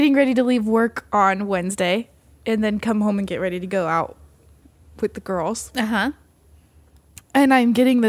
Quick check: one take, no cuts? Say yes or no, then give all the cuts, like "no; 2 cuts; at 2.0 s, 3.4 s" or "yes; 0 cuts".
yes; 0 cuts